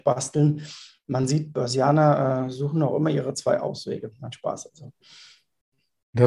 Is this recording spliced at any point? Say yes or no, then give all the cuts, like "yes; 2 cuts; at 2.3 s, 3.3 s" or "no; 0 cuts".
no; 0 cuts